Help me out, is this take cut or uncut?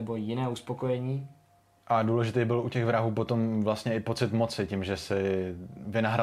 uncut